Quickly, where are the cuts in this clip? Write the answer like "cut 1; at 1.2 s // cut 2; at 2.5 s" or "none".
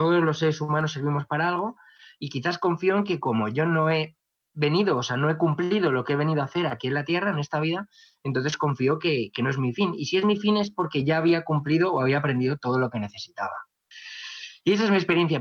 none